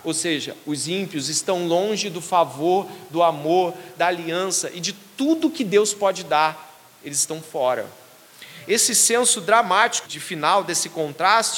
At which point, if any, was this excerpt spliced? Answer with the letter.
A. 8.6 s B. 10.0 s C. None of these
B